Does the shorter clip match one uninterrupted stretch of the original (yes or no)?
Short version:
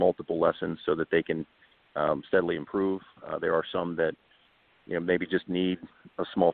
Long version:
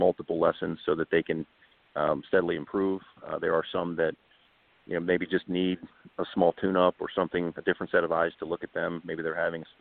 yes